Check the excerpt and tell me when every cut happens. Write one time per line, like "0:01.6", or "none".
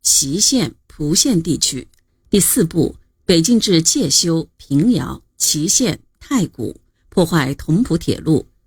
0:02.1